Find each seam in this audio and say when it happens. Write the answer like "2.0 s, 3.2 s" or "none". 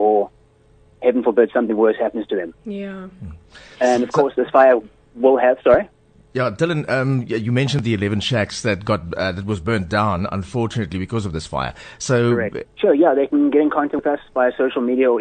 12.6 s